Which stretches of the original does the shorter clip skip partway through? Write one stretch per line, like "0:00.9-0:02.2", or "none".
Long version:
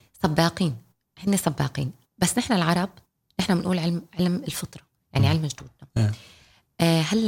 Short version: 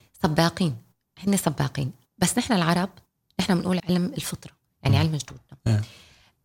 0:03.8-0:04.1